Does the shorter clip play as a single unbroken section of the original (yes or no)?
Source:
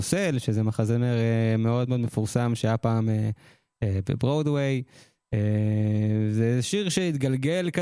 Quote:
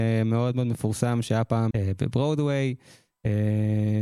no